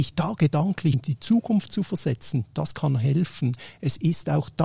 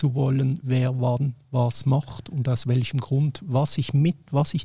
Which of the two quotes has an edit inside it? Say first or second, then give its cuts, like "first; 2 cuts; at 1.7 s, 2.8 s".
first; 1 cut; at 0.9 s